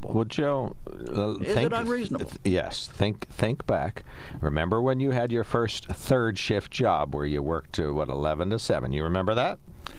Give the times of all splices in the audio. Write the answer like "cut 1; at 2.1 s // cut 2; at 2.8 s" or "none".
none